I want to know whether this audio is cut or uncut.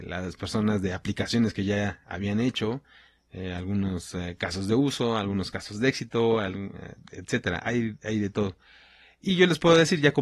uncut